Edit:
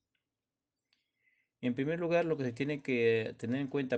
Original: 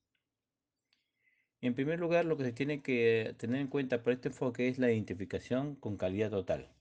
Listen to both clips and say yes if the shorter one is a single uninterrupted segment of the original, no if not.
yes